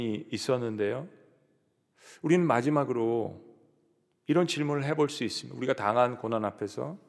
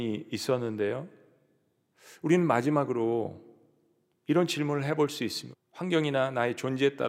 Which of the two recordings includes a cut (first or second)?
second